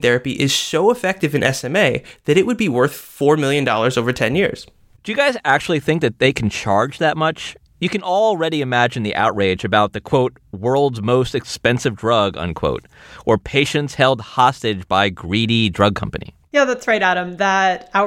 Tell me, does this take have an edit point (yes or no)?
no